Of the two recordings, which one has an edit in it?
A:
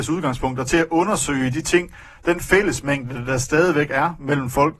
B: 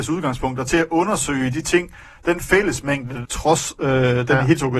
B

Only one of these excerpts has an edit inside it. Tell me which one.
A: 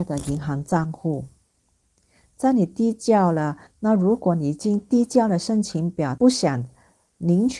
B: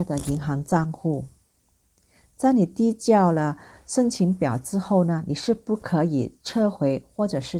A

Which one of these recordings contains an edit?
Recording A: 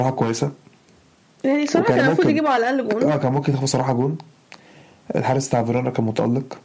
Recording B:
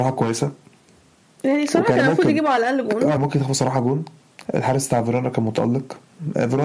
B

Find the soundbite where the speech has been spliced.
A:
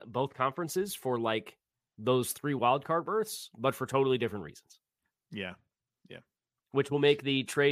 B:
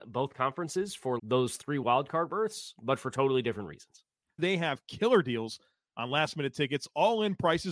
B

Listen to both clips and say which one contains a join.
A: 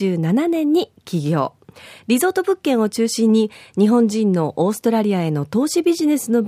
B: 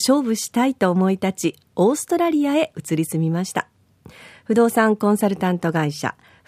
A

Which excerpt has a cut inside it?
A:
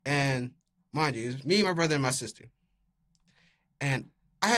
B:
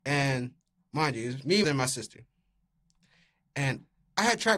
B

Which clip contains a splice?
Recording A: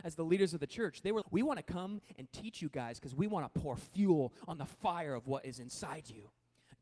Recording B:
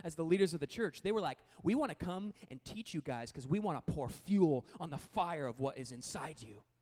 A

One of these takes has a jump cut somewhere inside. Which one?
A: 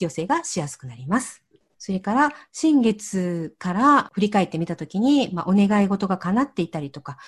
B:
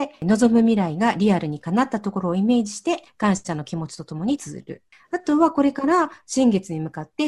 A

